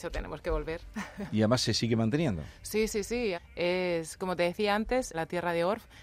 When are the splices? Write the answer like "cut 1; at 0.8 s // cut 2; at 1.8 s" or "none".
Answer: cut 1; at 3.3 s // cut 2; at 5.1 s